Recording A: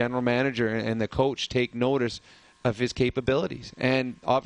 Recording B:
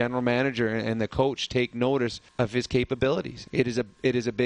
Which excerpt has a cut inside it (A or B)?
B